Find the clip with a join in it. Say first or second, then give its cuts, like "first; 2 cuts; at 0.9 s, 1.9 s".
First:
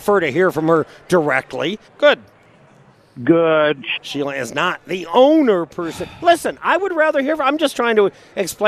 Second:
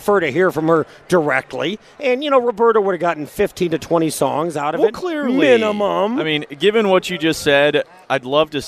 first; 2 cuts; at 1.8 s, 3.9 s